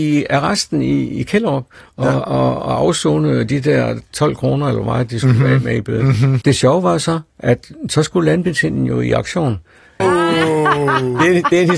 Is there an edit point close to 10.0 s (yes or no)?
yes